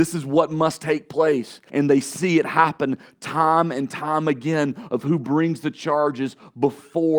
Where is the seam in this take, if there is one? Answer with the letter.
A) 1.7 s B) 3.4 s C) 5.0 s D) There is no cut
A